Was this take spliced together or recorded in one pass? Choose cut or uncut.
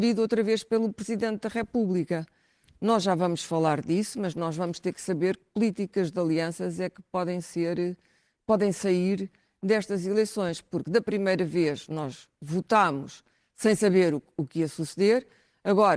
uncut